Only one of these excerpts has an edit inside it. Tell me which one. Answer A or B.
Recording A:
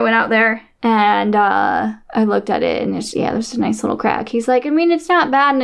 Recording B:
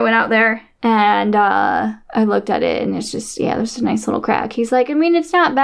A